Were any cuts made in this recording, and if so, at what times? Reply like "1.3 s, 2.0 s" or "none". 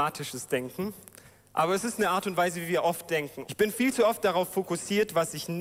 3.4 s